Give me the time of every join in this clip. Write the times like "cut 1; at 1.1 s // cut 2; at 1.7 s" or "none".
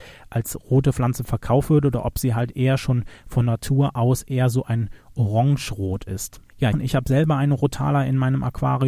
cut 1; at 6.7 s